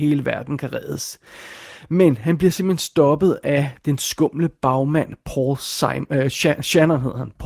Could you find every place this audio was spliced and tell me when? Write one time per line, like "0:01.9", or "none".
none

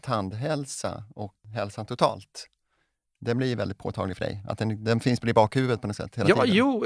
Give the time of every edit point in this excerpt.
none

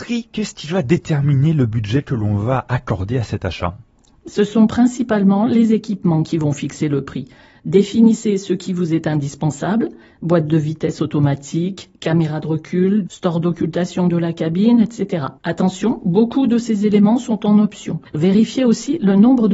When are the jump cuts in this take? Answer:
0:13.1
0:15.4
0:18.1

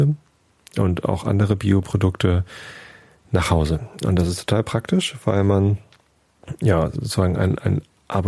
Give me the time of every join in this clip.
none

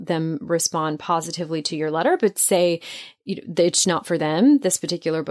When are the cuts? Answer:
0:03.8

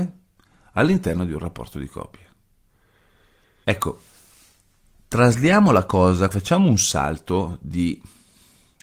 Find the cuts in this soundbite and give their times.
0:03.6
0:06.3

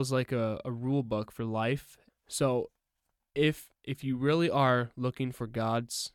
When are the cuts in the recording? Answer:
0:02.1

